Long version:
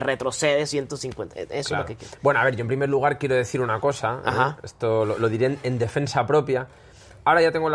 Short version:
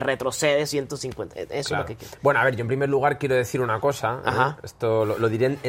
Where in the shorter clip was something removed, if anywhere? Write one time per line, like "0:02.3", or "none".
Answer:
none